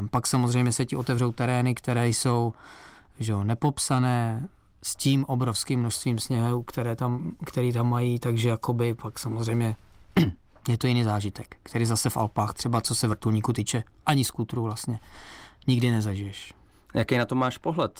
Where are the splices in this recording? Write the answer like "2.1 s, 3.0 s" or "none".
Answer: none